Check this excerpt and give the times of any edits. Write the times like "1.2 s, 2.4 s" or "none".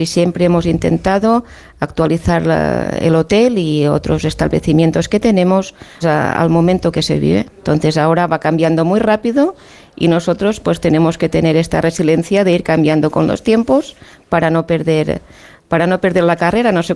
6.0 s